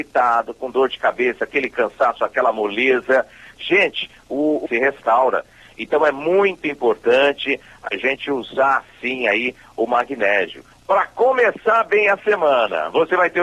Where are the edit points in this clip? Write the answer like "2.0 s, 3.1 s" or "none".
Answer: 4.6 s, 10.7 s